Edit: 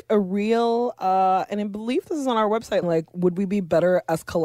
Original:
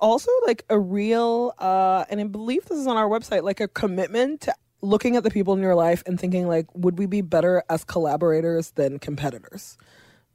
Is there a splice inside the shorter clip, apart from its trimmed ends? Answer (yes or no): yes